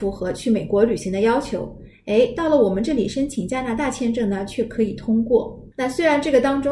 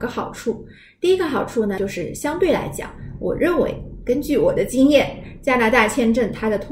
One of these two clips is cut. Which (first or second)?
first